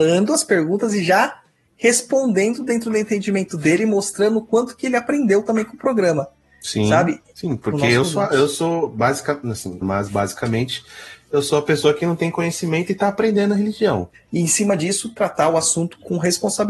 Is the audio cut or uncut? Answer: cut